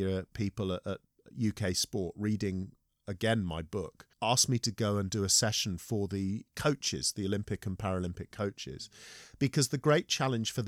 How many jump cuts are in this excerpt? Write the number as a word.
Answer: one